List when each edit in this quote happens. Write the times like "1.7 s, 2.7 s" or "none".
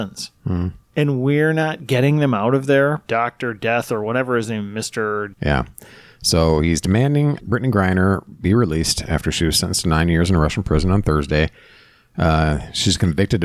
3.1 s, 5.3 s, 7.4 s

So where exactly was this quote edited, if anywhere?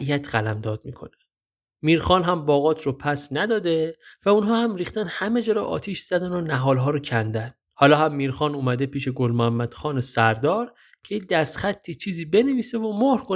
7.6 s

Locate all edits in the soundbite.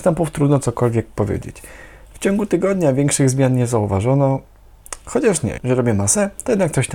5.6 s

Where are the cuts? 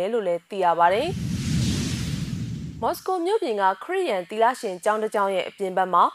none

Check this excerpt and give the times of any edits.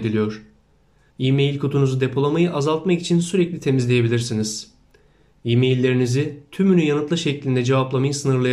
1.1 s

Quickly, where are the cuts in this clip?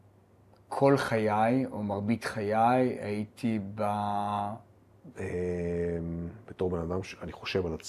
5.1 s

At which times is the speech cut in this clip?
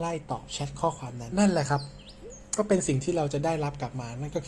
1.3 s

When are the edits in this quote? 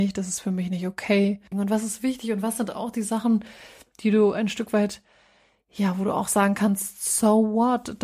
1.5 s

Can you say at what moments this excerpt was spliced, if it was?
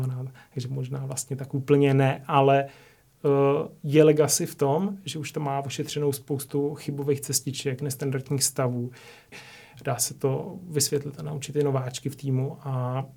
9.3 s

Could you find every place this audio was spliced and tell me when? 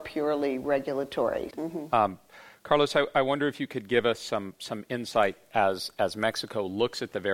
1.5 s

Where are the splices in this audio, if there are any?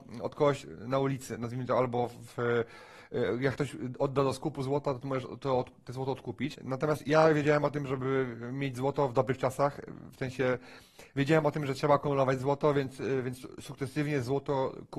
6.5 s

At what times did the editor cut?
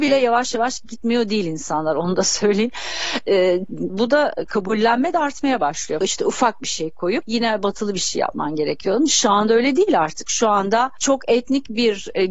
3.9 s, 6.0 s

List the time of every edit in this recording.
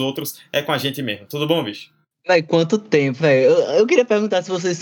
3.2 s

